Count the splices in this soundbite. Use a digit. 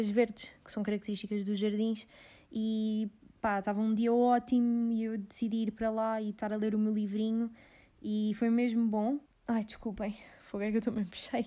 1